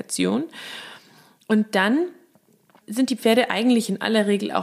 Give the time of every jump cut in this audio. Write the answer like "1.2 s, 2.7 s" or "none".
2.8 s